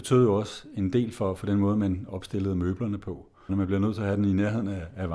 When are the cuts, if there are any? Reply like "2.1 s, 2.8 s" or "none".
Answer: 3.5 s